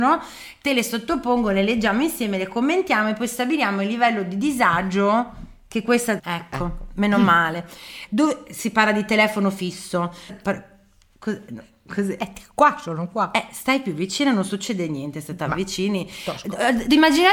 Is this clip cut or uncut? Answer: cut